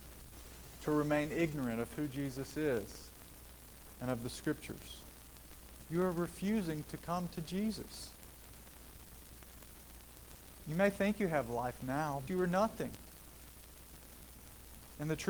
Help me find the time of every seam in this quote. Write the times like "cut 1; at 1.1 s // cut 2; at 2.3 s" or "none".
cut 1; at 12.3 s